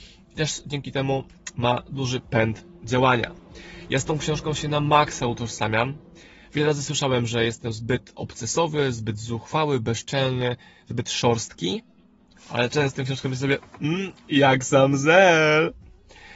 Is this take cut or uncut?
uncut